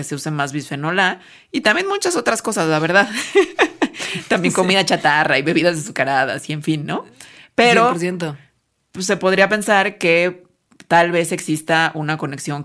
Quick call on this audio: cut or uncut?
uncut